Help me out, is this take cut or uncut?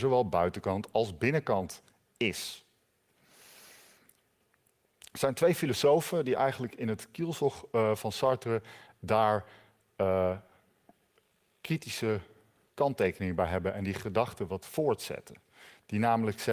uncut